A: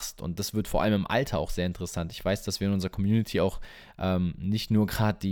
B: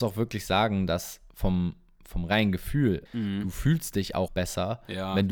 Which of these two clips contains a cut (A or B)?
B